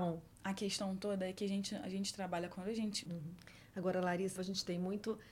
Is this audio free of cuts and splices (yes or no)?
no